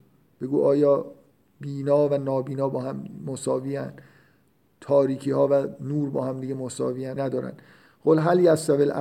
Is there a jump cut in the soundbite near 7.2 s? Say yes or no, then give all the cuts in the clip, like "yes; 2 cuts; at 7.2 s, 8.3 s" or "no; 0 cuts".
yes; 1 cut; at 7.2 s